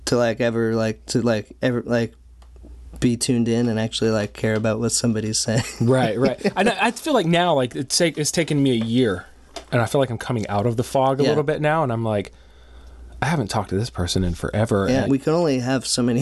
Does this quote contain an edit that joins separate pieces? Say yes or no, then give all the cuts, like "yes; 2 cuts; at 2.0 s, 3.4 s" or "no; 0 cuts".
yes; 1 cut; at 15.1 s